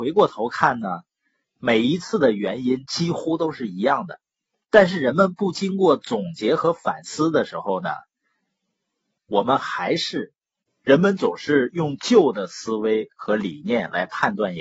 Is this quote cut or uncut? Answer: cut